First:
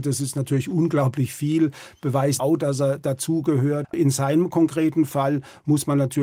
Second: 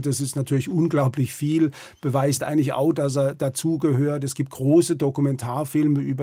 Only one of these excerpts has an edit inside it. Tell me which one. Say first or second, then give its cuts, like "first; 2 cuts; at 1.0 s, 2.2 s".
first; 2 cuts; at 2.4 s, 3.8 s